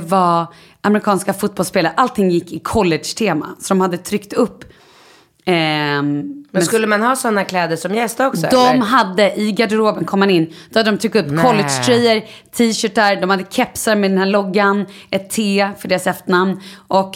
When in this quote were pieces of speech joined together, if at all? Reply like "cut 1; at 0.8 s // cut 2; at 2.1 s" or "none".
none